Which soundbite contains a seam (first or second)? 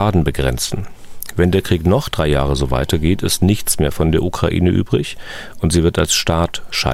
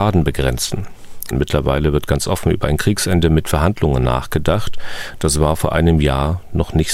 second